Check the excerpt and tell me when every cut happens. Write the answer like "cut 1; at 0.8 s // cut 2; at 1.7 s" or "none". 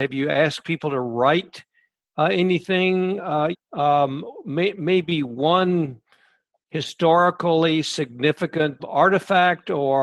cut 1; at 3.5 s // cut 2; at 8.8 s